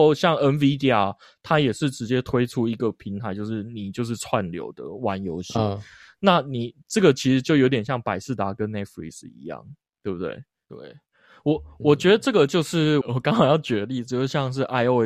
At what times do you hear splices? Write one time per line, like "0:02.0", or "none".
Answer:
0:10.7
0:13.0